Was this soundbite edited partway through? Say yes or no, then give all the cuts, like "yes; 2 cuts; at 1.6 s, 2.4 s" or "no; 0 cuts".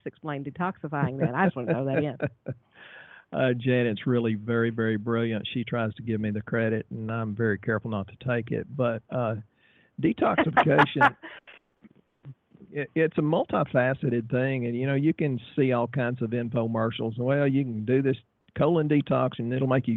no; 0 cuts